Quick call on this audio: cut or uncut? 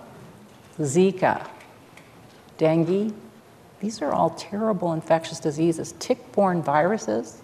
uncut